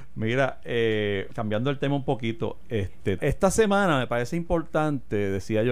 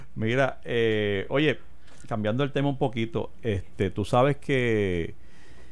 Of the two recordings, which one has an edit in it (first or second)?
first